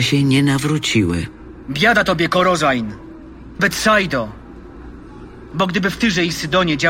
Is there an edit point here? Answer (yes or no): yes